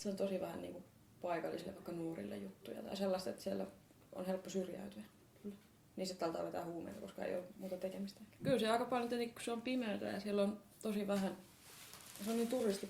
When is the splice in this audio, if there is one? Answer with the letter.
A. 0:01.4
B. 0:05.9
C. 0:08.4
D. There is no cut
C